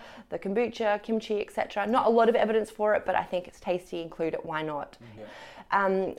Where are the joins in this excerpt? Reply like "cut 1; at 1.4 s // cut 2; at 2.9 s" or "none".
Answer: cut 1; at 5.2 s